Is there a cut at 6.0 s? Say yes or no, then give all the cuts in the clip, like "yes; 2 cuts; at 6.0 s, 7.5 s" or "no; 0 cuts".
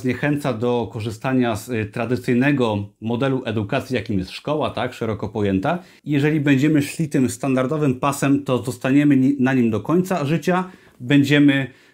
yes; 1 cut; at 6.0 s